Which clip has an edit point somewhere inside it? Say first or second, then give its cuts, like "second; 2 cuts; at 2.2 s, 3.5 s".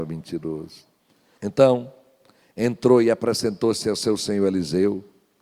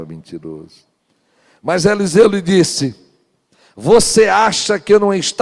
first; 1 cut; at 1.4 s